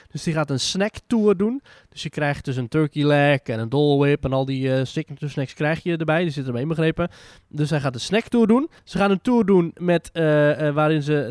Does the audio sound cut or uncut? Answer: cut